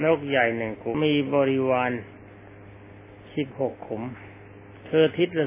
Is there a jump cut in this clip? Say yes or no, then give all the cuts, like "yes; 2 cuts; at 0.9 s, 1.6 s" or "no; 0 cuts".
yes; 1 cut; at 0.9 s